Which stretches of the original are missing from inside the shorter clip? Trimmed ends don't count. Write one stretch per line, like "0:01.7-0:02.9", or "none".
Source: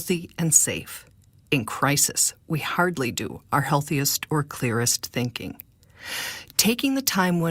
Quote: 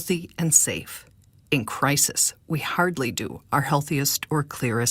none